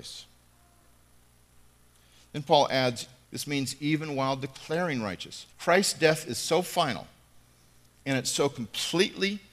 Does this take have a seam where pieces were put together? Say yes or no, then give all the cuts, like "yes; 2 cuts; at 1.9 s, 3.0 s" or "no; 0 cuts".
yes; 2 cuts; at 3.2 s, 5.5 s